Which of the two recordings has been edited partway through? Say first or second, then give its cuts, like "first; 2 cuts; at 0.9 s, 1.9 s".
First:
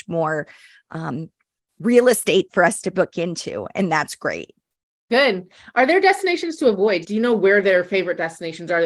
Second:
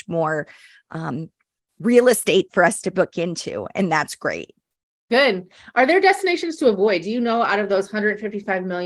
first; 1 cut; at 7.0 s